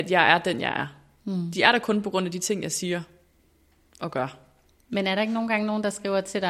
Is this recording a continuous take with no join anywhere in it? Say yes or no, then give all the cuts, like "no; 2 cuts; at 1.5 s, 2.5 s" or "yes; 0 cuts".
yes; 0 cuts